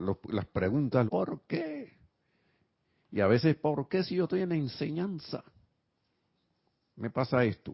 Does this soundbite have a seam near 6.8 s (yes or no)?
no